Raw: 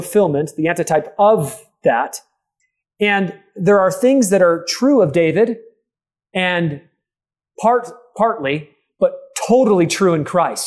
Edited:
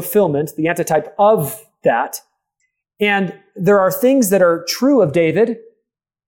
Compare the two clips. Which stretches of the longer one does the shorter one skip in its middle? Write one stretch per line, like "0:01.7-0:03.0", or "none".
none